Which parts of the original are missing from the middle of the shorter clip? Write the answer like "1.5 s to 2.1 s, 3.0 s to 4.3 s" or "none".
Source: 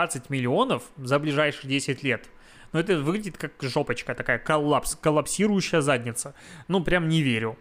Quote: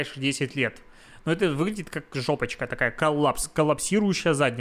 none